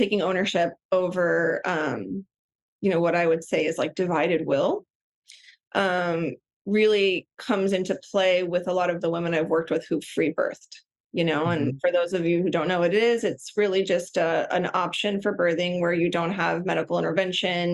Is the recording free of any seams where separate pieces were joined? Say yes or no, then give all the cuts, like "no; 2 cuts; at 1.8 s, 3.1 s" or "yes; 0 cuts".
yes; 0 cuts